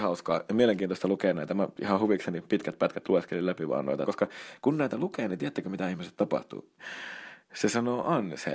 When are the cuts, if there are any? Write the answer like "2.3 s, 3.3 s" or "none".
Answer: 4.1 s, 6.8 s

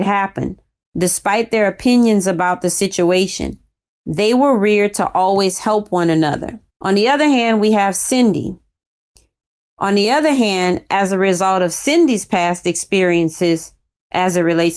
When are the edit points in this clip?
6.7 s, 9.6 s

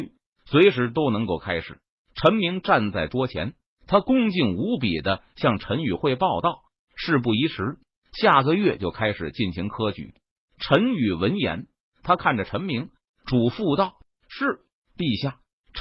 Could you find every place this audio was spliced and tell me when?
10.4 s

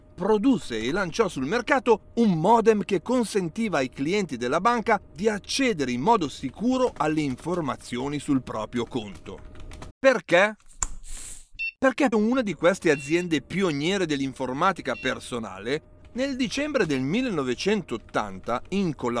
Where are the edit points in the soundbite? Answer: 9.9 s, 12.1 s, 16.0 s

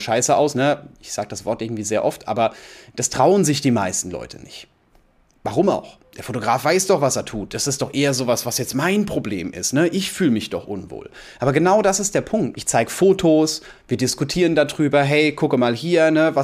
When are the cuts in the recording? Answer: 12.5 s

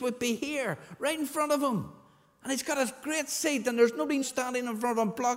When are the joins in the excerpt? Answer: 4.2 s

